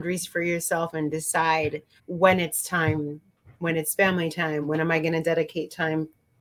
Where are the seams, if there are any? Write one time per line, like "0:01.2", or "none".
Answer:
0:02.0
0:04.6